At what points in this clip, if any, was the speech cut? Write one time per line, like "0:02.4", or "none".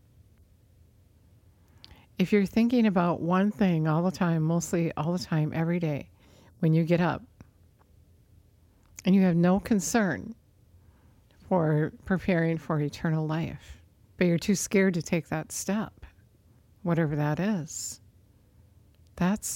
0:14.1